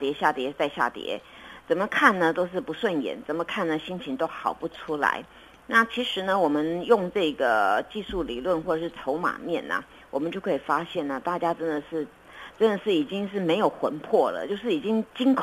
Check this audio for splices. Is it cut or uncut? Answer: uncut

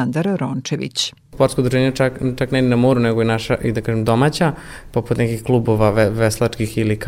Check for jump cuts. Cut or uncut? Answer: uncut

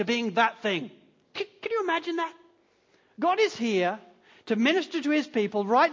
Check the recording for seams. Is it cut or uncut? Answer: cut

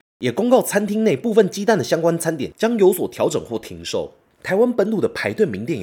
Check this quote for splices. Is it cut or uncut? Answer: uncut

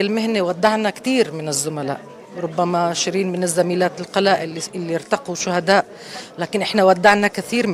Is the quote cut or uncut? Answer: uncut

